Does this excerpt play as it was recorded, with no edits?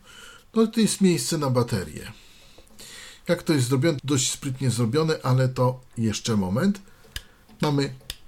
no; 1 cut; at 4.0 s

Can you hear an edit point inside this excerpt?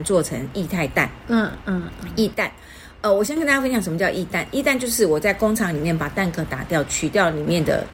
no; 0 cuts

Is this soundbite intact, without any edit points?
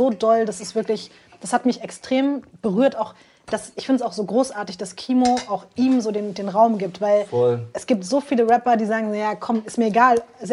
yes; 0 cuts

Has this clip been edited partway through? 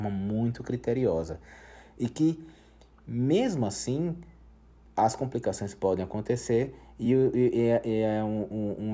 no; 0 cuts

